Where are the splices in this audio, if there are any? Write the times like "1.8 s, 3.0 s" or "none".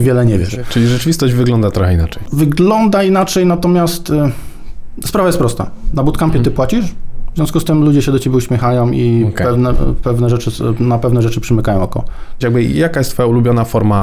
12.4 s